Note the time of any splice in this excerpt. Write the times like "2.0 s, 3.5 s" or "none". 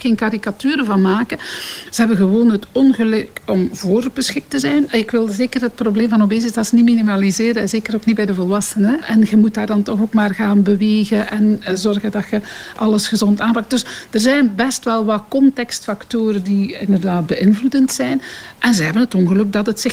4.9 s, 9.0 s